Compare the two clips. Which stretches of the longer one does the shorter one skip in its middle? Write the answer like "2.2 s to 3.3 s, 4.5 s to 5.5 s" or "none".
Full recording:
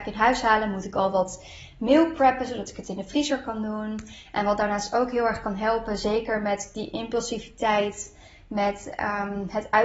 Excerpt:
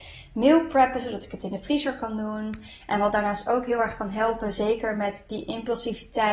none